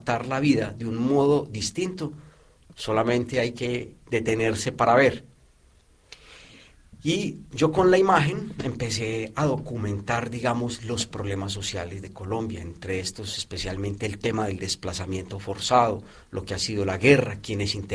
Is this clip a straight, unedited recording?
yes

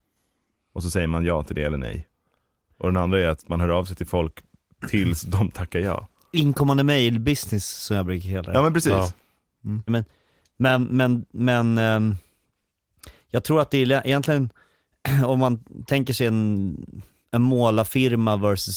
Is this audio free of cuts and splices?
no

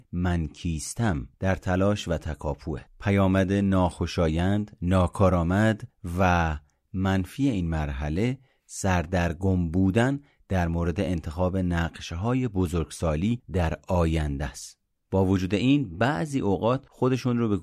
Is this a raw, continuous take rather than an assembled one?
no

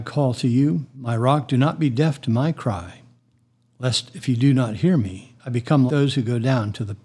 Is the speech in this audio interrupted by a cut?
yes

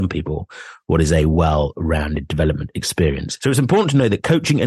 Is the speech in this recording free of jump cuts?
no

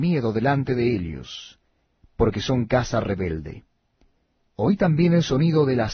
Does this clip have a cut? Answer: yes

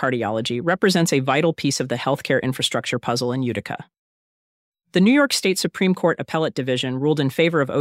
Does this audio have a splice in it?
yes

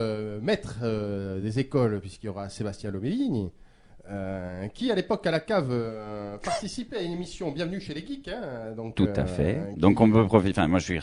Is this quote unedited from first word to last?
yes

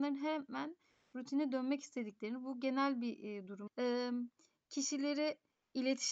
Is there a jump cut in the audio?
yes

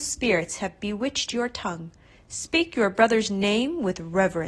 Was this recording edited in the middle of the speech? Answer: no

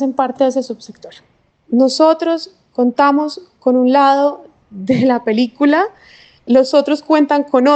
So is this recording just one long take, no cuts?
yes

